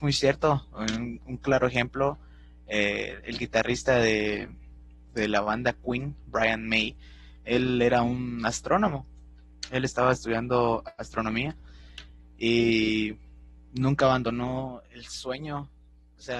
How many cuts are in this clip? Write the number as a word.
zero